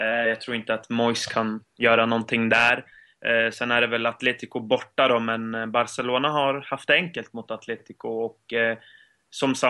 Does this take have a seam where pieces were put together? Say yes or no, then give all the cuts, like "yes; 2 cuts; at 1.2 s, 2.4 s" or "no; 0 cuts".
no; 0 cuts